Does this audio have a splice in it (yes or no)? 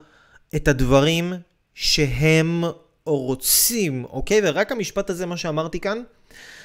no